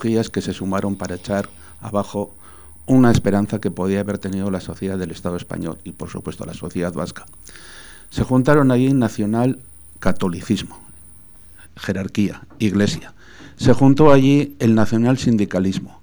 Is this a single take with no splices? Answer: yes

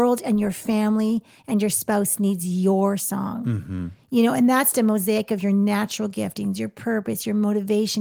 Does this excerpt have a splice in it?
yes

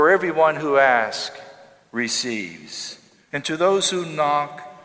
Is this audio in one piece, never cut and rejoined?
no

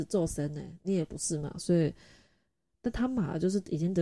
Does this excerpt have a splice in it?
yes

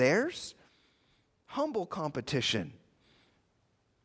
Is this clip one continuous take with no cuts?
no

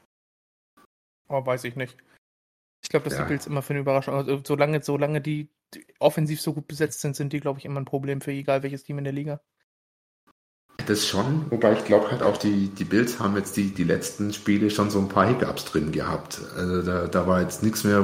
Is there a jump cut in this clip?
no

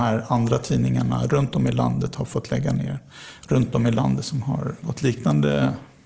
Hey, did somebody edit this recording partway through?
yes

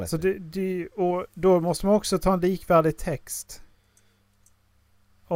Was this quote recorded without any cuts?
yes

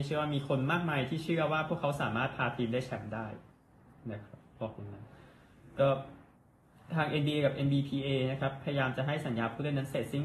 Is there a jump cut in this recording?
no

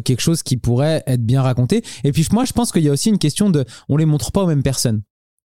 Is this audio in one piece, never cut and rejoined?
yes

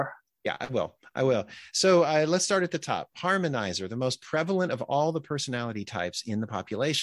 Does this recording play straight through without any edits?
yes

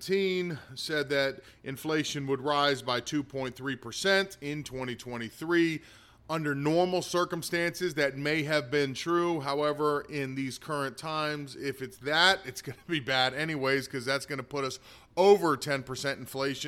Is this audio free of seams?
yes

